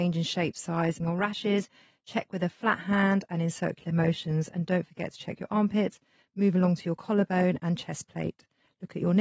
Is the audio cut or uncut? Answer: cut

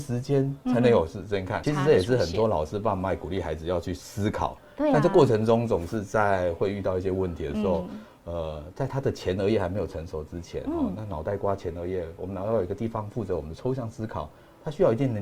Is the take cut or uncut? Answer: cut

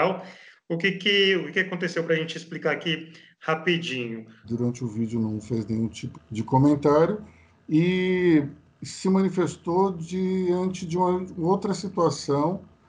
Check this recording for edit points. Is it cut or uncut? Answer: cut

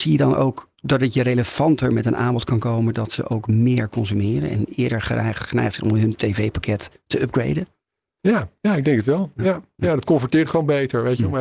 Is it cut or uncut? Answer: uncut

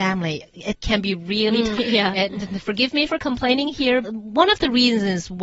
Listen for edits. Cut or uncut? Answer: cut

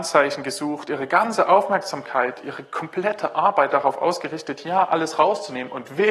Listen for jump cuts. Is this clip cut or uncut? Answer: uncut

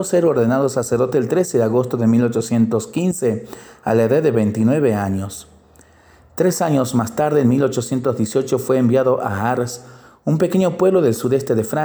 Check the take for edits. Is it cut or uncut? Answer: uncut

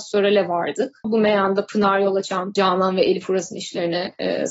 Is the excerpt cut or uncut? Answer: cut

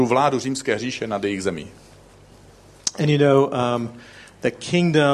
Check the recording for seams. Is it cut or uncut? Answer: uncut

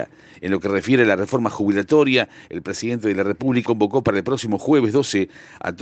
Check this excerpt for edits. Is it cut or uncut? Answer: cut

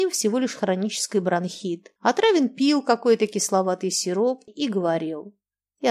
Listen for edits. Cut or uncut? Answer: cut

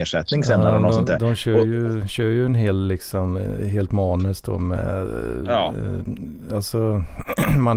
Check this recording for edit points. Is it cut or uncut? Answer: uncut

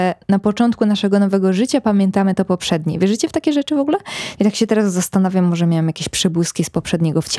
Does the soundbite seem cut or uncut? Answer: cut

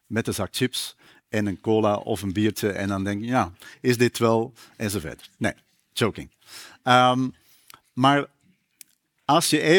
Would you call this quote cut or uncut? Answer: uncut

